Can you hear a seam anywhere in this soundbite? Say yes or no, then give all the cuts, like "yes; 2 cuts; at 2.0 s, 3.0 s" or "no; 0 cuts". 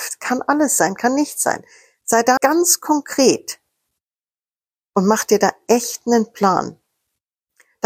yes; 1 cut; at 2.4 s